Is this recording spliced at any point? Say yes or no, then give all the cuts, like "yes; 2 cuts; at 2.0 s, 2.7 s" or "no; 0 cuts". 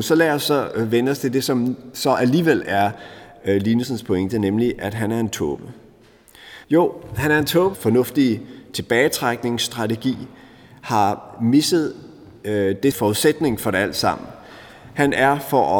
yes; 3 cuts; at 6.6 s, 7.7 s, 12.9 s